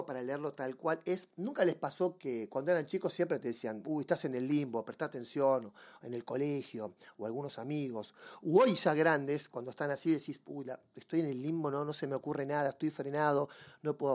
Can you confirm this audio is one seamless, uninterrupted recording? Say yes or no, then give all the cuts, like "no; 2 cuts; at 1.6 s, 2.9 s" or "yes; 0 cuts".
yes; 0 cuts